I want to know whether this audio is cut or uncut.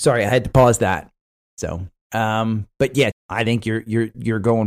cut